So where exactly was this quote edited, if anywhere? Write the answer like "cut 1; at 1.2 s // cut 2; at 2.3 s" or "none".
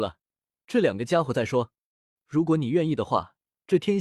cut 1; at 2.2 s

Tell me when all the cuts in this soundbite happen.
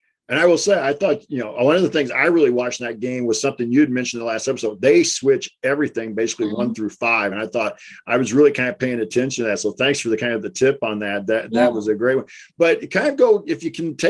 none

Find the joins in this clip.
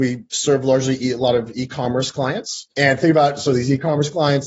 cut 1; at 2.7 s

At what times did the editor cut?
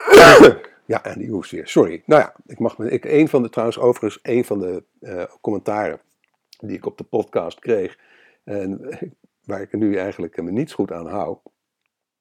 none

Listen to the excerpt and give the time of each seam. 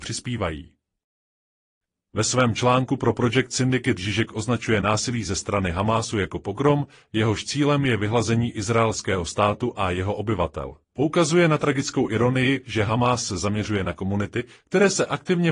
cut 1; at 10.8 s

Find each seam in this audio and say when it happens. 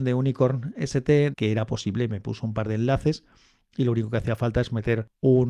cut 1; at 1.3 s

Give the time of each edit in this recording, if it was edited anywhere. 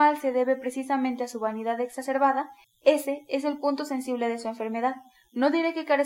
cut 1; at 2.6 s

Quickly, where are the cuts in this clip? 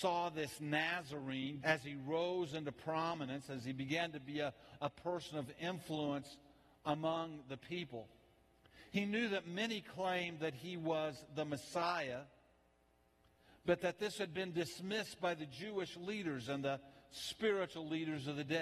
cut 1; at 1.6 s

